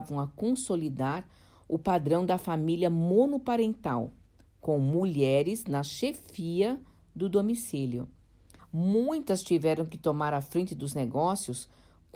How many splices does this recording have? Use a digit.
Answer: 1